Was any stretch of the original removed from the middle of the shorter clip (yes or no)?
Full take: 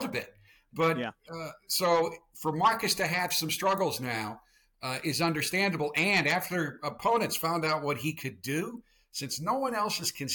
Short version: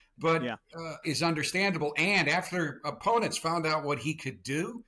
yes